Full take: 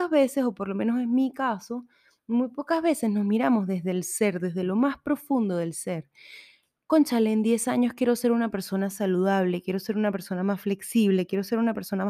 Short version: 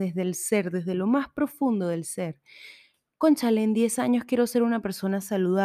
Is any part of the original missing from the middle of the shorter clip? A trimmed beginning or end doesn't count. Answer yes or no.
no